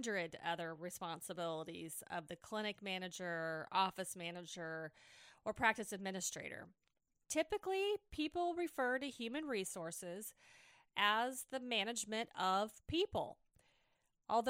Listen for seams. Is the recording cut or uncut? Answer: uncut